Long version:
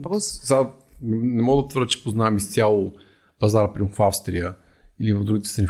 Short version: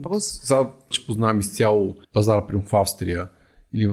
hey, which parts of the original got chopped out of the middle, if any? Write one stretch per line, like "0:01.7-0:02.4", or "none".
0:00.9-0:01.9
0:03.0-0:03.3